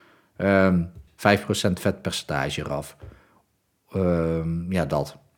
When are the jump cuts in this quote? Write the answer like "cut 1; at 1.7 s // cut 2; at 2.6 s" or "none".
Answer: cut 1; at 1.1 s